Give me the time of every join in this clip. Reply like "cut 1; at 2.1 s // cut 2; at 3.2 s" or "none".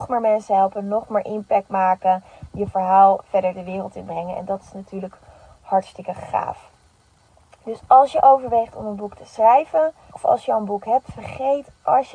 cut 1; at 10.1 s